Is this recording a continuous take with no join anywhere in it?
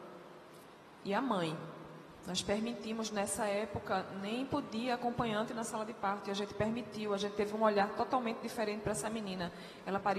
yes; 0 cuts

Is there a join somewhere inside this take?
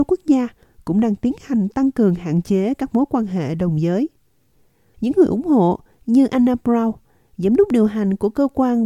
yes; 1 cut; at 4.9 s

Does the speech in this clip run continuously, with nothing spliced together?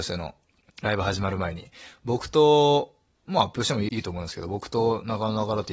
no; 1 cut; at 3.9 s

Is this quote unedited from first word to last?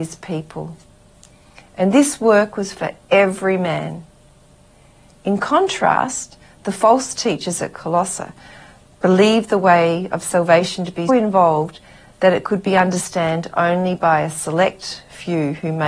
no; 1 cut; at 11.1 s

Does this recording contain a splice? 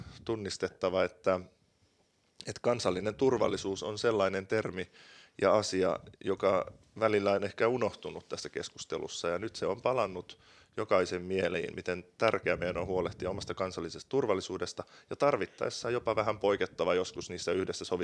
no; 0 cuts

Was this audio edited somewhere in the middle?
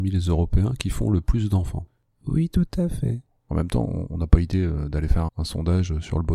yes; 2 cuts; at 3.4 s, 5.3 s

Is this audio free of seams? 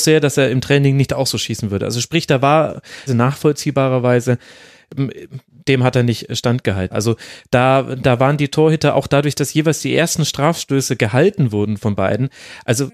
no; 2 cuts; at 3.1 s, 6.9 s

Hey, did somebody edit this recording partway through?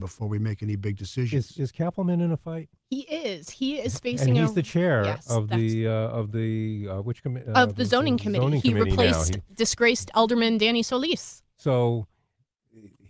no; 0 cuts

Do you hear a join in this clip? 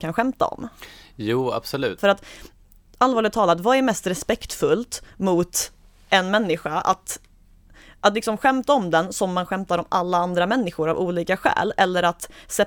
yes; 1 cut; at 2.0 s

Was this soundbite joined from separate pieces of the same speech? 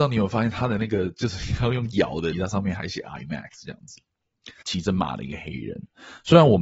yes; 2 cuts; at 2.3 s, 4.6 s

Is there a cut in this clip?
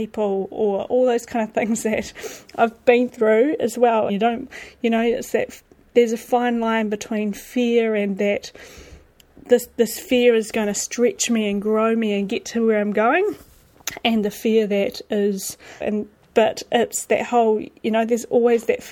yes; 2 cuts; at 4.1 s, 15.8 s

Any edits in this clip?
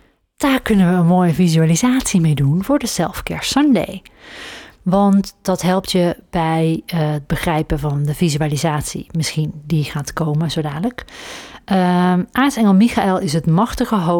yes; 1 cut; at 4.8 s

